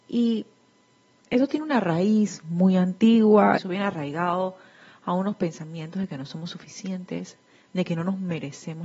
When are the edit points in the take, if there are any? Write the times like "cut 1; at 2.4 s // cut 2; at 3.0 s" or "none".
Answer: cut 1; at 3.6 s